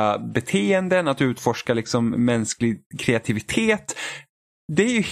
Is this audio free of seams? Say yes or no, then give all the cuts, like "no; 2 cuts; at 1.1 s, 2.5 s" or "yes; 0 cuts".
yes; 0 cuts